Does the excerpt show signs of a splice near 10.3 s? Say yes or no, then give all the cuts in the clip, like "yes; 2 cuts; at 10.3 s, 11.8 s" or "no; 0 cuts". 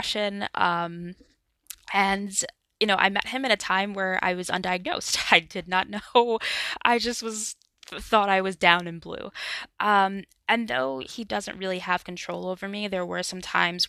no; 0 cuts